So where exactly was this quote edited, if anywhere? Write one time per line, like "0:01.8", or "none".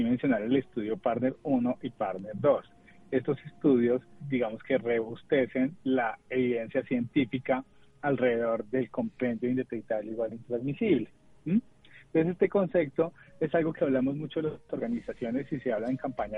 0:04.2